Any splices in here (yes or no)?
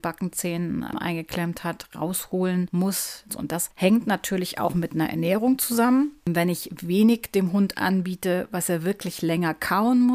yes